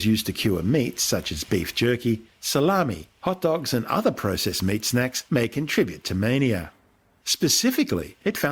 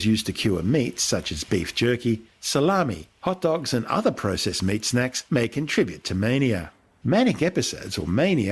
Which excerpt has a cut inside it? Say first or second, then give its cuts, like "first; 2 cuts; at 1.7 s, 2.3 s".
second; 1 cut; at 6.9 s